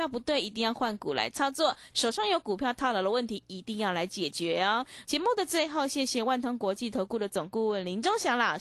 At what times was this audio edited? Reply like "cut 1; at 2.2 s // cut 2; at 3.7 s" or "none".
cut 1; at 1.9 s // cut 2; at 5.0 s